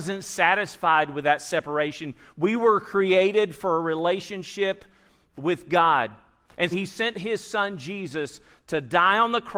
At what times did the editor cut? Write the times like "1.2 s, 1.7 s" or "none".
6.7 s